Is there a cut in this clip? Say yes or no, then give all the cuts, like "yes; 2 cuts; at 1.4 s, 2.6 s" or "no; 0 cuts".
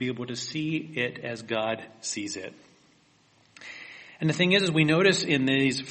no; 0 cuts